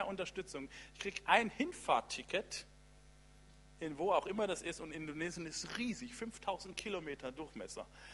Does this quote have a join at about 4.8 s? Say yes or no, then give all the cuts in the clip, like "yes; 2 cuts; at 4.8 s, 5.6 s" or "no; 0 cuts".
no; 0 cuts